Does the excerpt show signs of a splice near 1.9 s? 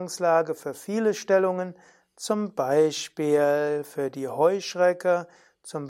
no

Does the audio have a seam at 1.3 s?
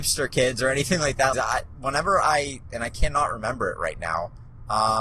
yes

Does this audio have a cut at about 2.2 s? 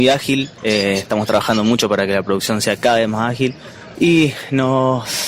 no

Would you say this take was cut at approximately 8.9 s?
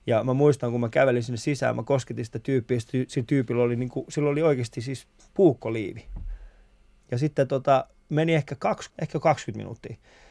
yes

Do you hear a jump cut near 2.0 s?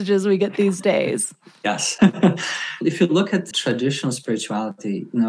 yes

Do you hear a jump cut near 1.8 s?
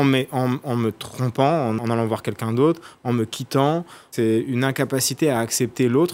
yes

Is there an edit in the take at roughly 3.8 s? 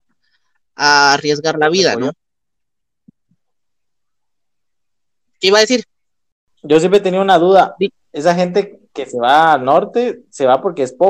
no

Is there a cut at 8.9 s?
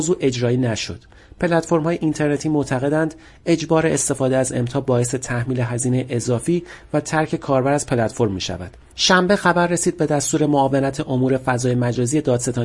yes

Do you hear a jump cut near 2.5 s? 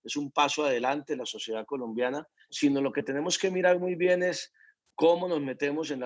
yes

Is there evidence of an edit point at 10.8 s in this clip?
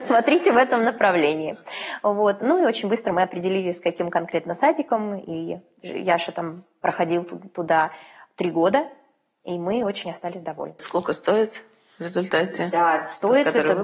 yes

